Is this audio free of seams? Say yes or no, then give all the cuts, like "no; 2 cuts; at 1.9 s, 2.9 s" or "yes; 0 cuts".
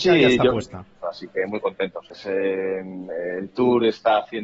no; 2 cuts; at 1.0 s, 2.1 s